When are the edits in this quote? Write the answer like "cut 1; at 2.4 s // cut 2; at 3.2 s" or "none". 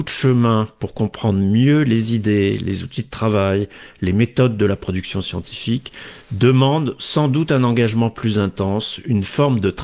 none